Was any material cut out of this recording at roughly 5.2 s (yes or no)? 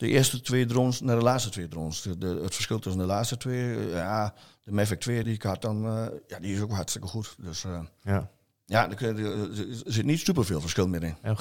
yes